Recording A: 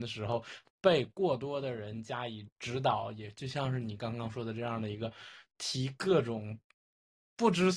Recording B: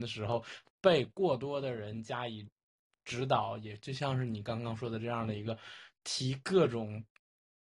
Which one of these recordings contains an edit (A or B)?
A